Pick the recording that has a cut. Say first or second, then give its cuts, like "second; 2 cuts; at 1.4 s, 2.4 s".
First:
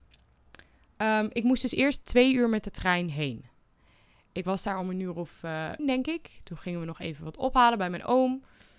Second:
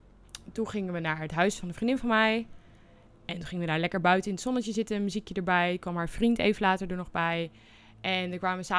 first; 1 cut; at 5.8 s